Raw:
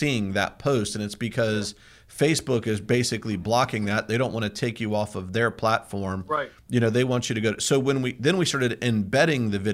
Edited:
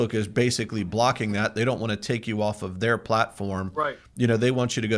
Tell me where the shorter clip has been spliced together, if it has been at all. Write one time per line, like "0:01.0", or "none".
none